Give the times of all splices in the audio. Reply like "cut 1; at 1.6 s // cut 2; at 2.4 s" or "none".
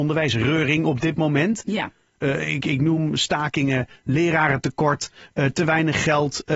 none